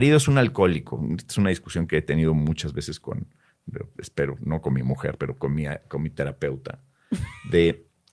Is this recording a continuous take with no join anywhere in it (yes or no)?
yes